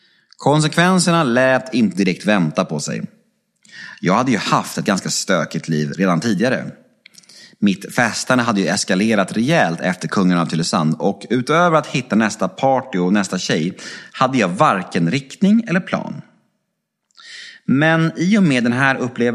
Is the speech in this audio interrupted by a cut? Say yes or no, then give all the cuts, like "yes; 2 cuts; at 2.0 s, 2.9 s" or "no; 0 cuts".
no; 0 cuts